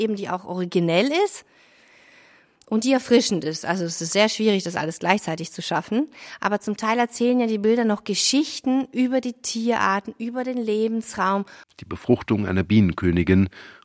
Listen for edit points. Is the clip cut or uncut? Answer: cut